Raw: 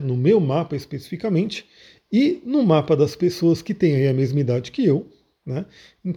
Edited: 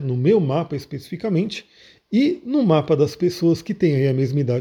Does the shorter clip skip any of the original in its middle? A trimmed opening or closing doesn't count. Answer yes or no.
no